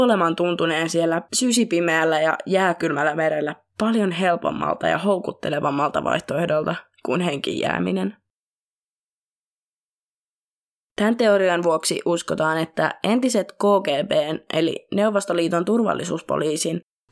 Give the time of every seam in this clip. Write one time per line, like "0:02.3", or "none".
0:10.9